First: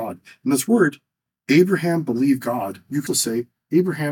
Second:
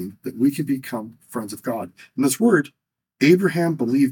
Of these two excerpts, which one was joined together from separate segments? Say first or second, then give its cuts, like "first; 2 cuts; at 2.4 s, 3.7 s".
first; 1 cut; at 3.1 s